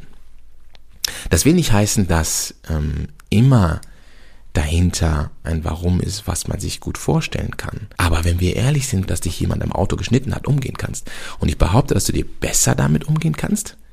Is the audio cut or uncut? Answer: cut